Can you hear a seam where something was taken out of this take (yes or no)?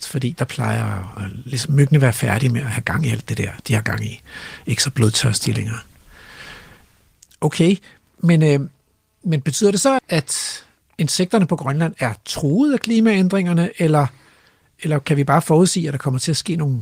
yes